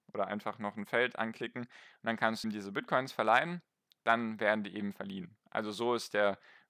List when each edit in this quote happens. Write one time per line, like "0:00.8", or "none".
0:02.4